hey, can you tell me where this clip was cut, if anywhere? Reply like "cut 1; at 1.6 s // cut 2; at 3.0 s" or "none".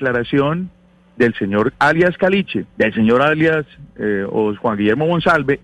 cut 1; at 2.7 s